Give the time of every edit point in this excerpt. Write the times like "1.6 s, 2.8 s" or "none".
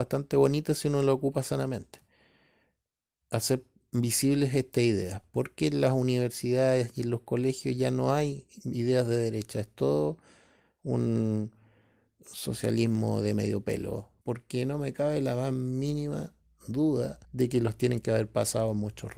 14.2 s, 17.2 s